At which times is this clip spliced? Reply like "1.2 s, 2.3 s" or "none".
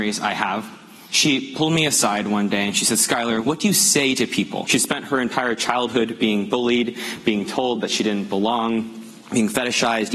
4.7 s

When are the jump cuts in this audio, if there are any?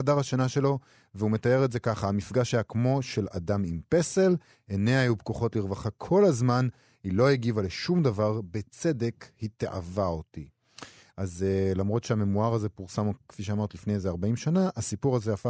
none

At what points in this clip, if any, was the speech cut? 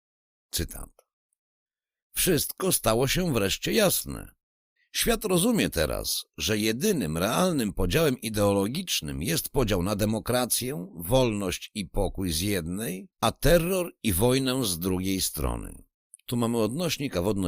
4.8 s, 13.1 s

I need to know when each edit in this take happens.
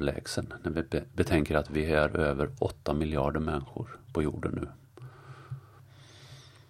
none

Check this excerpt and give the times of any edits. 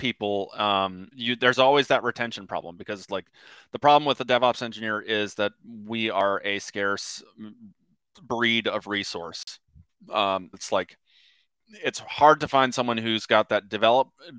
1.1 s, 10.5 s

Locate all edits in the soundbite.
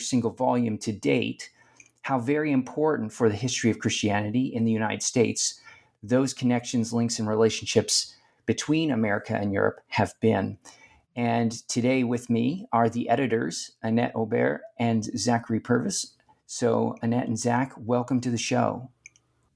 none

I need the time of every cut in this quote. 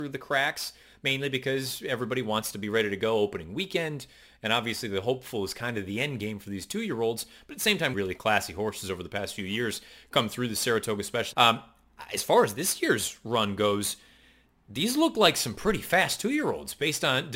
7.9 s, 11.3 s

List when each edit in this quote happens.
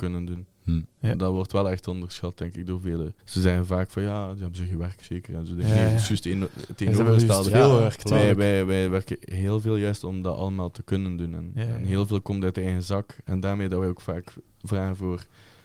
3.2 s

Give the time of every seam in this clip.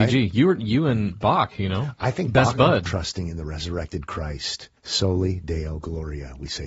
2.9 s, 4.8 s

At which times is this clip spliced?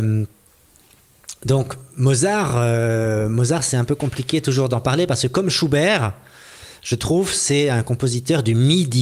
none

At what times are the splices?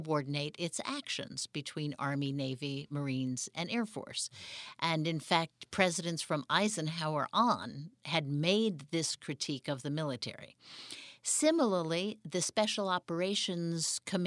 none

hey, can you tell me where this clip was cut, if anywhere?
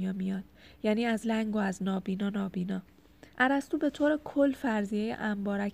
1.2 s, 3.3 s

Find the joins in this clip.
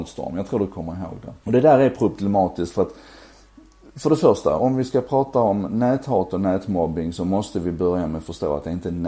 1.4 s, 4.6 s

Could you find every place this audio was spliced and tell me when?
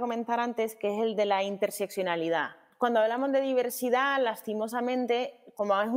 none

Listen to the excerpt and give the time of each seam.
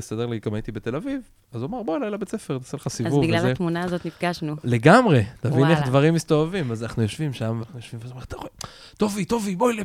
7.6 s

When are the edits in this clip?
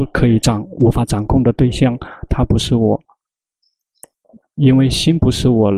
2.3 s

